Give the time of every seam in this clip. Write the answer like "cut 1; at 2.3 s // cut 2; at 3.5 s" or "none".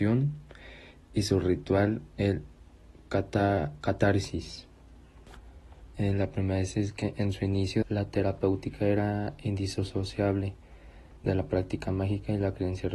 cut 1; at 6.0 s // cut 2; at 7.8 s